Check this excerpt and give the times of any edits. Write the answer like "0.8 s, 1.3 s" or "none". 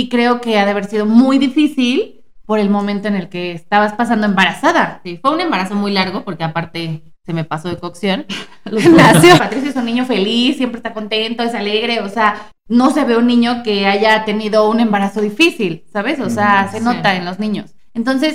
9.4 s